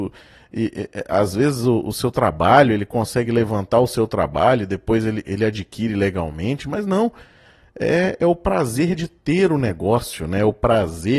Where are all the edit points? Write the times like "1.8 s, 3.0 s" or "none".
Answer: none